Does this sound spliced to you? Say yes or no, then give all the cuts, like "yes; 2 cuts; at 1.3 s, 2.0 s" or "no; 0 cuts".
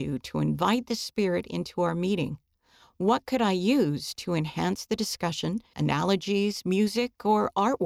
yes; 1 cut; at 5.7 s